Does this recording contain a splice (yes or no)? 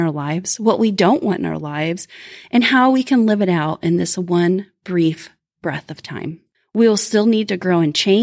no